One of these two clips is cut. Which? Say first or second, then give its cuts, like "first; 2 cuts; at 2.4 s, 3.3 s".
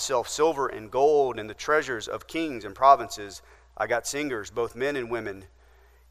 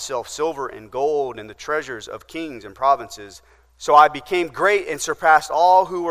second; 1 cut; at 3.6 s